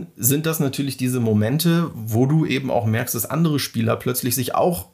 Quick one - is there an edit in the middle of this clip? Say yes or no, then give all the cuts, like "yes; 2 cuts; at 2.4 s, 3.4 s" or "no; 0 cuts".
no; 0 cuts